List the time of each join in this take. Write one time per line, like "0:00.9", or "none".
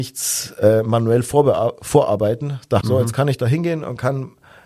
0:02.8